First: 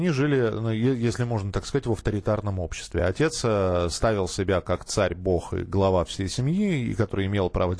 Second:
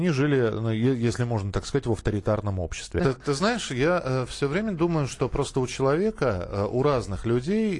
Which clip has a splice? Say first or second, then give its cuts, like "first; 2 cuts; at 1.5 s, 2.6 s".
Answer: second; 1 cut; at 3.0 s